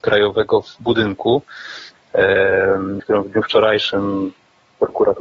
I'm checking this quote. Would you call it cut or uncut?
cut